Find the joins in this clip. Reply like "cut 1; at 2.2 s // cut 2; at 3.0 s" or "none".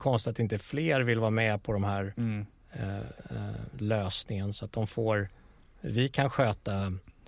none